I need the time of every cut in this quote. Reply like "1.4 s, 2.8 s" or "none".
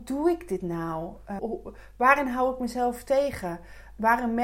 1.4 s